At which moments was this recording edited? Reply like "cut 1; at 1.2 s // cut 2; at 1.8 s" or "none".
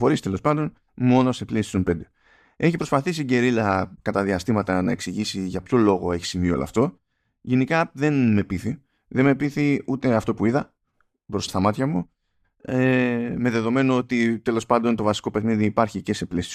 cut 1; at 11.5 s